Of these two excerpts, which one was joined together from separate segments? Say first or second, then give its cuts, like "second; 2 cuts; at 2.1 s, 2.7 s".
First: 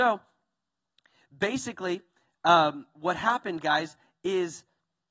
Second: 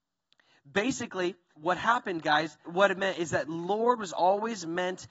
second; 2 cuts; at 1.5 s, 2.6 s